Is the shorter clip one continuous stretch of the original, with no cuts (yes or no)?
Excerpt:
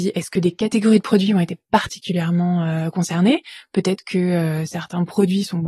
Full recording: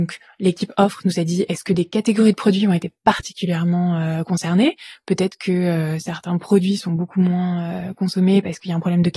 yes